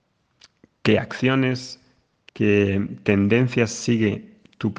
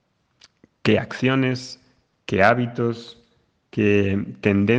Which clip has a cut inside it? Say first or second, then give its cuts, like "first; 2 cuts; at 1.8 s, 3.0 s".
first; 1 cut; at 2.3 s